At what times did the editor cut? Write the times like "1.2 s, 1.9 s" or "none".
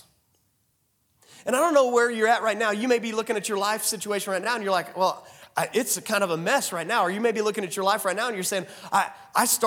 none